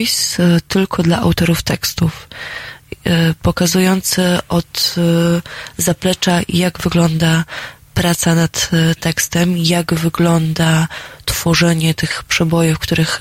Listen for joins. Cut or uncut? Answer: uncut